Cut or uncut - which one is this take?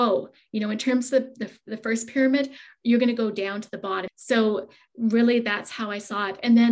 cut